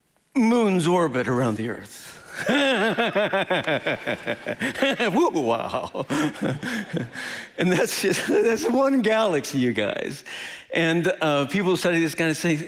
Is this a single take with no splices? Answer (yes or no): yes